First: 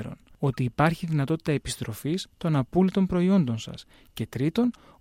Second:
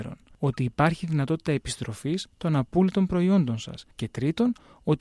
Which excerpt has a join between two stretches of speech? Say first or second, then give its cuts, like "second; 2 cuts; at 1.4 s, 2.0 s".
second; 1 cut; at 3.9 s